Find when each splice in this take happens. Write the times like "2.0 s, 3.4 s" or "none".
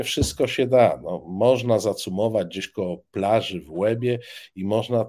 none